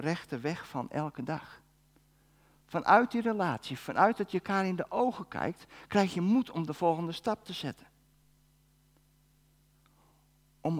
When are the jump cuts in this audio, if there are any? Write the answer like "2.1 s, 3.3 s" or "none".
none